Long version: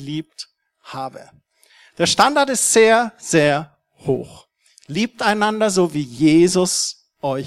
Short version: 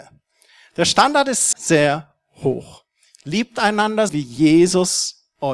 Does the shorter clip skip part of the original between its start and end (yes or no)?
yes